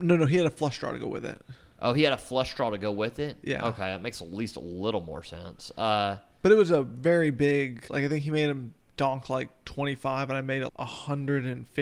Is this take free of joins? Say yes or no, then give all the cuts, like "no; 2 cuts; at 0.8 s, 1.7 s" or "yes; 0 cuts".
no; 2 cuts; at 7.9 s, 10.7 s